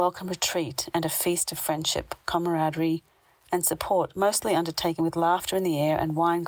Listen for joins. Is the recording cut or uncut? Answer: uncut